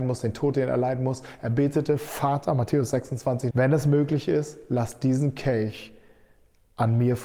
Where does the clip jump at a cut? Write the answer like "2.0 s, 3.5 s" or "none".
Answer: 3.5 s